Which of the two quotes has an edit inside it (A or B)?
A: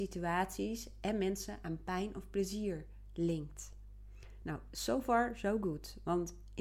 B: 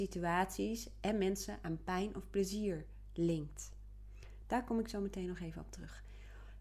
B